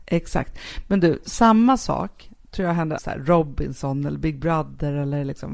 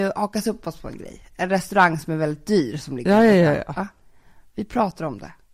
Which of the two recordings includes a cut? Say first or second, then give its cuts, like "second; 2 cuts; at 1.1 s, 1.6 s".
first; 1 cut; at 3.0 s